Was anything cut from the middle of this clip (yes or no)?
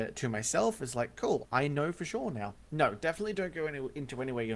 yes